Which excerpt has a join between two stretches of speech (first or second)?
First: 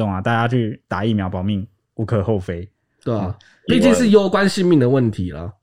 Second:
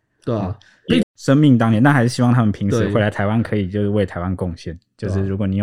second